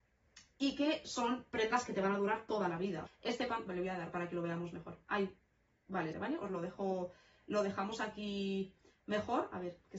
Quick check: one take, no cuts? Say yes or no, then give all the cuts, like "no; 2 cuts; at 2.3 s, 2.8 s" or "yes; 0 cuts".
no; 2 cuts; at 3.1 s, 6.1 s